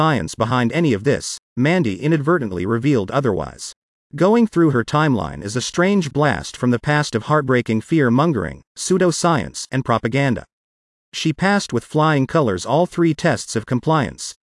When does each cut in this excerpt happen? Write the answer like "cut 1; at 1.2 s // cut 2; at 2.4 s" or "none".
cut 1; at 4.0 s